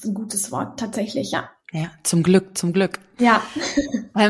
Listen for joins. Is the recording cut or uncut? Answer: uncut